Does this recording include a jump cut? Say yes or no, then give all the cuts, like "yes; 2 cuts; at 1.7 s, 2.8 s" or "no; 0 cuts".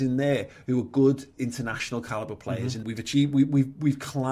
yes; 1 cut; at 2.8 s